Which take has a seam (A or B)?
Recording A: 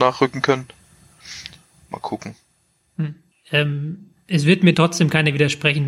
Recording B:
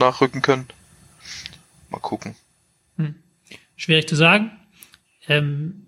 A